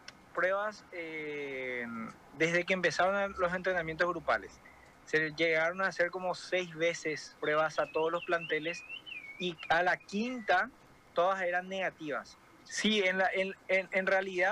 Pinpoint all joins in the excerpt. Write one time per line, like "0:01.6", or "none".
0:07.4
0:12.6